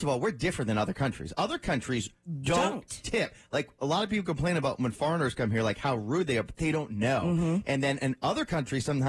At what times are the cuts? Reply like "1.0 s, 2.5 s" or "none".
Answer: none

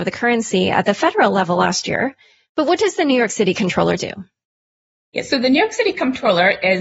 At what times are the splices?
none

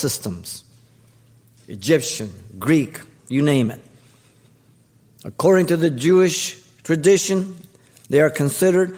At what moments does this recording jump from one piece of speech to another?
3.2 s

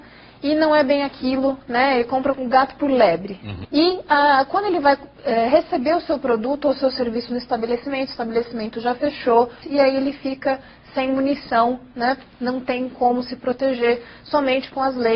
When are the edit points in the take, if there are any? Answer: 3.6 s, 9.6 s

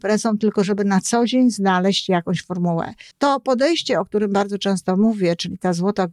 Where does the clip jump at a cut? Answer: 3.1 s

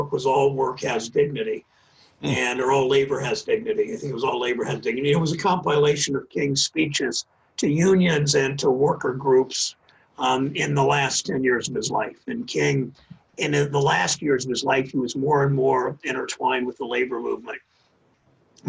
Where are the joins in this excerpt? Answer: none

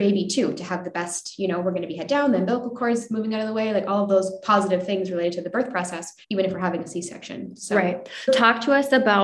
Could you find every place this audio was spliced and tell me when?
6.2 s, 8.3 s

